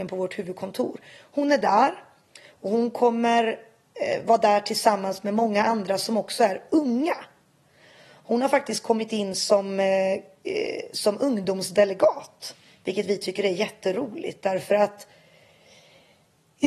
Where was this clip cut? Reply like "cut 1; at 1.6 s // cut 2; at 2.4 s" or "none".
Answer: none

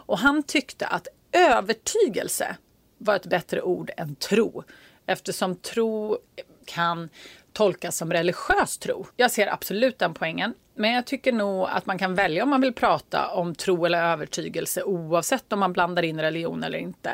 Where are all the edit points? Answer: cut 1; at 6.6 s // cut 2; at 9.1 s

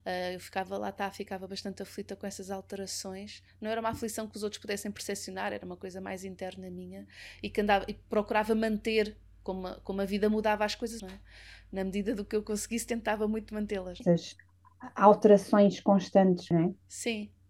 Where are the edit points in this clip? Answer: cut 1; at 11.0 s // cut 2; at 14.0 s // cut 3; at 16.5 s

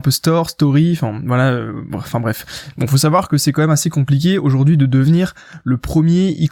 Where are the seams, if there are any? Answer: cut 1; at 2.7 s

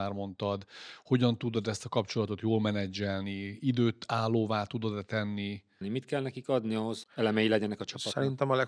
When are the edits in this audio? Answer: cut 1; at 5.8 s // cut 2; at 7.0 s

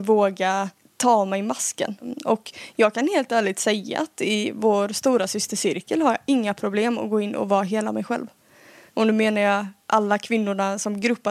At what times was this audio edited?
cut 1; at 8.9 s

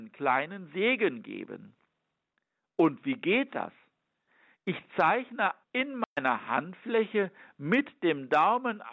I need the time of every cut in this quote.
cut 1; at 5.6 s

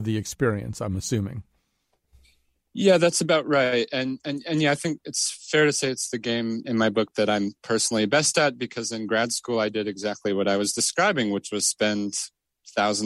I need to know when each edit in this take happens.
none

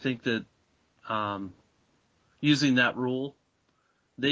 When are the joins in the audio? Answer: none

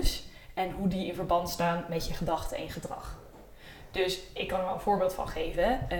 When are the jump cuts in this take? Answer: none

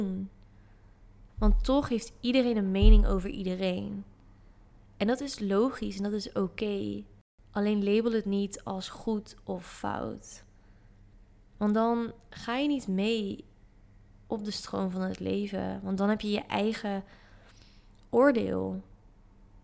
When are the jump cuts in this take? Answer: cut 1; at 1.3 s

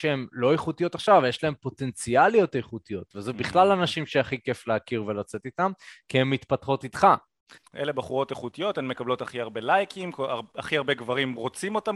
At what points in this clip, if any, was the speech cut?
cut 1; at 7.6 s

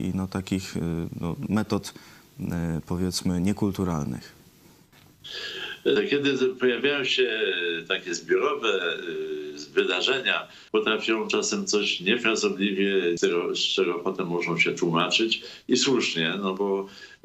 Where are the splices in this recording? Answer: cut 1; at 6.0 s // cut 2; at 10.7 s // cut 3; at 13.2 s

